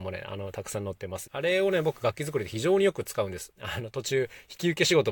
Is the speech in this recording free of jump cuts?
no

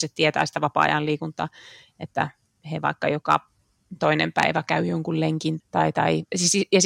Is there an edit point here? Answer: yes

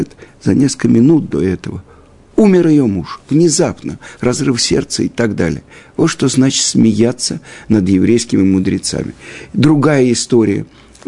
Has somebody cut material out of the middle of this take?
no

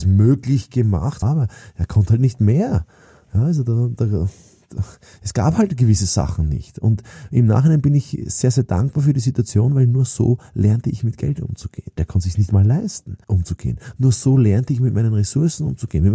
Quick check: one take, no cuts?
no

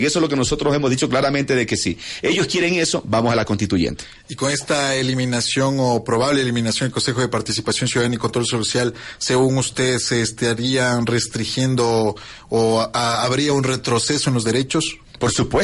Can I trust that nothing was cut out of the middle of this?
yes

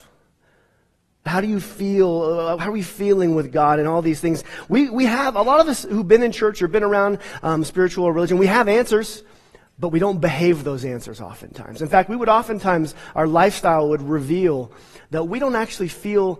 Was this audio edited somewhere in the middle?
yes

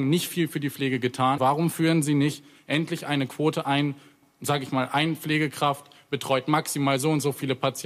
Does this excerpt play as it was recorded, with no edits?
no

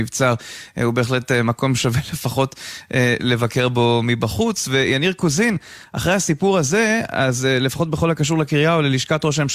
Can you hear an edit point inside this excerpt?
no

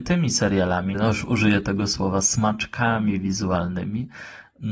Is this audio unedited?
no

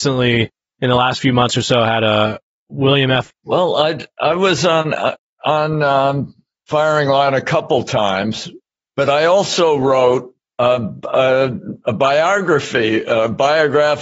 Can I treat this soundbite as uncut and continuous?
no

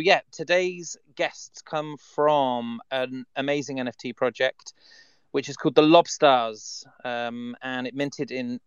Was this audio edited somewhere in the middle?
no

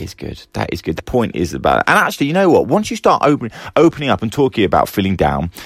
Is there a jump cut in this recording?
yes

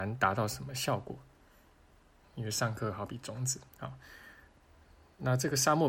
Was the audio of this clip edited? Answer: yes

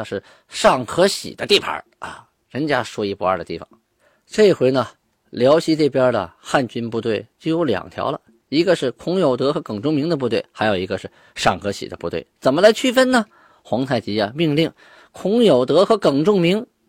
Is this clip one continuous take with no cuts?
yes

